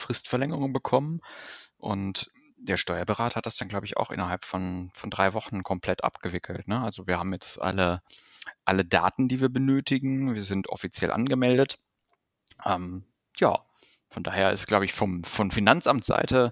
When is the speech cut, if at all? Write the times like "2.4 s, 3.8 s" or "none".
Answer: none